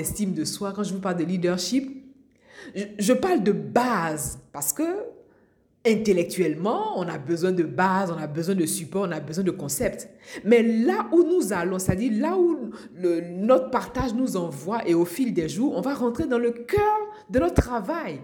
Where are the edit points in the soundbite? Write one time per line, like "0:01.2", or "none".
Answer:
none